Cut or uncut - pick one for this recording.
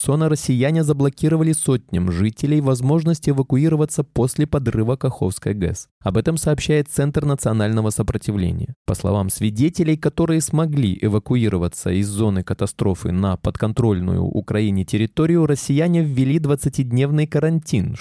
uncut